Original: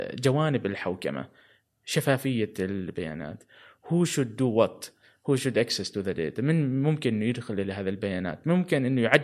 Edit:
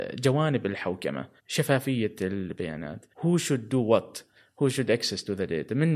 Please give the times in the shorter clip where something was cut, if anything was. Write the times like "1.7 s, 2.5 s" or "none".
1.4 s, 3.1 s